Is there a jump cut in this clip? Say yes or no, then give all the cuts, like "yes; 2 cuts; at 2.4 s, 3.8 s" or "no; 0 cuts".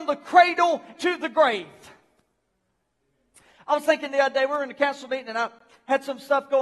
yes; 1 cut; at 1.0 s